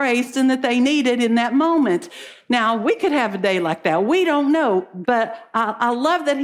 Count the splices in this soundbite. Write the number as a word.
one